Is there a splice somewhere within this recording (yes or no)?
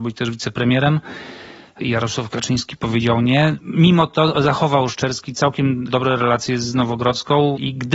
no